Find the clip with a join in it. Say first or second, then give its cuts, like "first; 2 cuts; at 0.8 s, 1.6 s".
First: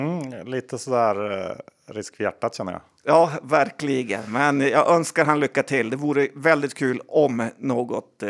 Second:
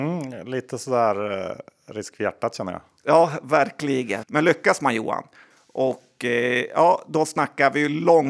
second; 1 cut; at 4.2 s